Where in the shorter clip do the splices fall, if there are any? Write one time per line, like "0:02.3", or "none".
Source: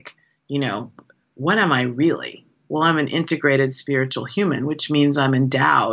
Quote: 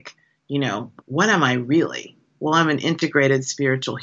0:01.0